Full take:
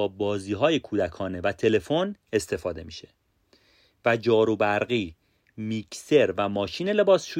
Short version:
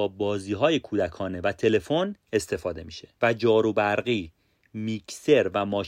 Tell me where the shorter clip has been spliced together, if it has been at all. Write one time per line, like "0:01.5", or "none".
0:03.2